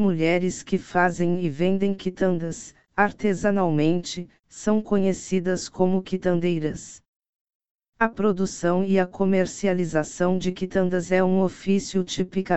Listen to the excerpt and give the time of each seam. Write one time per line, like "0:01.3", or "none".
none